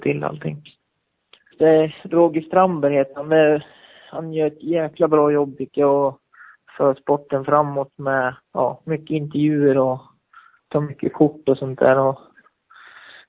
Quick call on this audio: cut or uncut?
cut